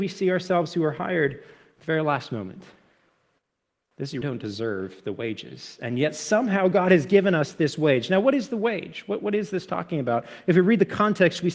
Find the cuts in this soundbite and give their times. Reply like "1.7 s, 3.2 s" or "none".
4.2 s